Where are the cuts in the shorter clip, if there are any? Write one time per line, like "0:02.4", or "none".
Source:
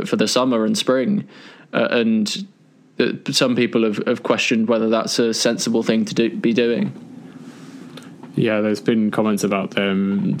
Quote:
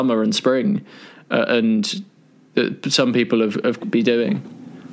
0:03.8